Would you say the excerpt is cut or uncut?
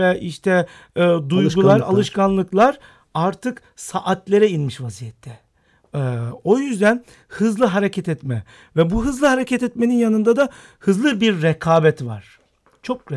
uncut